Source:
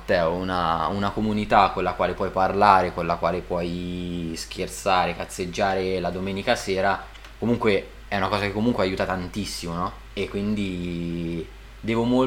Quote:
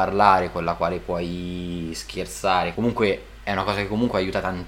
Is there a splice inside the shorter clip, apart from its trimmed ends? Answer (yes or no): yes